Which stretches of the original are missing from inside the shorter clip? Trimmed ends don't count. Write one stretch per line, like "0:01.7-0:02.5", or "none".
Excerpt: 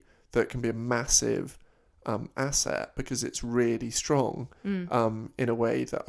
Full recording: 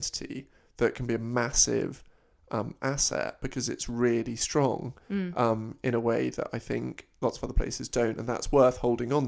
none